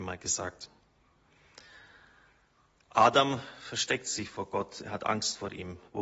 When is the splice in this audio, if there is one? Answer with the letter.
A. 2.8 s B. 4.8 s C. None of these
C